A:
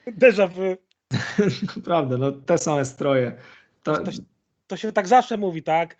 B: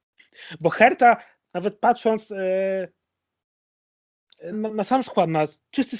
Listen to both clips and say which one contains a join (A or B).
B